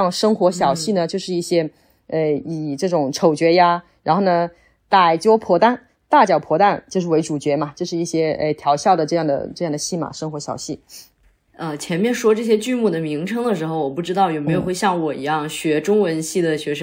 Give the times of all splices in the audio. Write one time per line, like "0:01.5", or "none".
0:11.5